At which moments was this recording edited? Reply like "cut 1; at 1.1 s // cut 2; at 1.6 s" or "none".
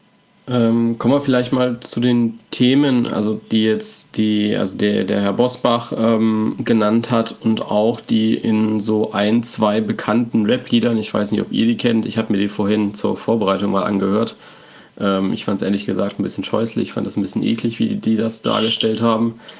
none